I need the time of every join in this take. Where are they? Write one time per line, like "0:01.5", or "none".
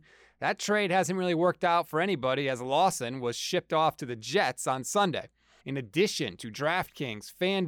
0:05.6